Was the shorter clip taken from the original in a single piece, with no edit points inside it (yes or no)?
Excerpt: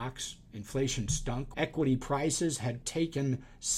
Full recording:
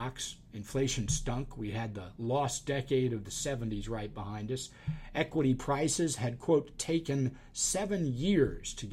no